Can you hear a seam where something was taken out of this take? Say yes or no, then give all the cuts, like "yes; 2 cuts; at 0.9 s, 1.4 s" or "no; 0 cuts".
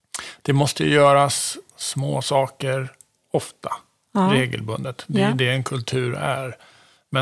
yes; 1 cut; at 1.7 s